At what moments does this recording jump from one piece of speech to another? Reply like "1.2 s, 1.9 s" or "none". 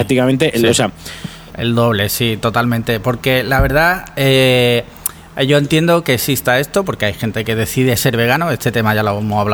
1.5 s